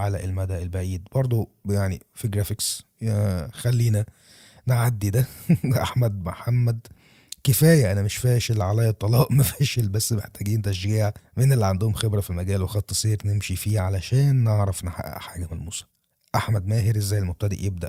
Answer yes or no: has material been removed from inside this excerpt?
no